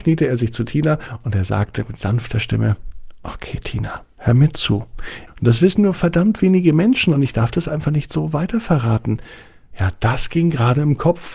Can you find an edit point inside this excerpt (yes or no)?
yes